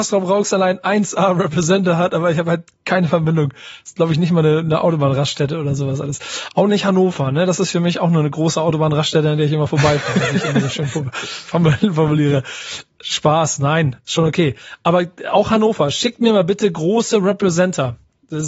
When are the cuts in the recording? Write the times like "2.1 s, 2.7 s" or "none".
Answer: none